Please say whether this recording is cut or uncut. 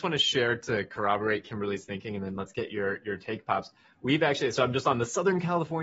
uncut